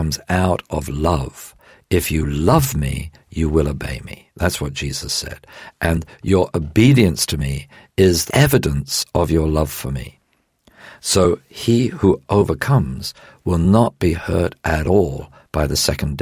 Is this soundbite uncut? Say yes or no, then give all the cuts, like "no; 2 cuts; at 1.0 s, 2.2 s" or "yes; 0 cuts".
no; 1 cut; at 8.3 s